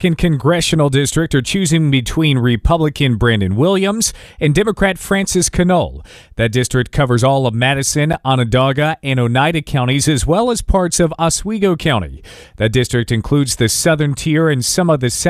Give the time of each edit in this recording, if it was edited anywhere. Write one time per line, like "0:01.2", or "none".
0:12.4